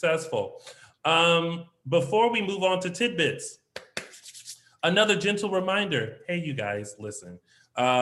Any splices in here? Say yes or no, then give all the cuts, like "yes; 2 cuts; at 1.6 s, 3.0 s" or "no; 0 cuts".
no; 0 cuts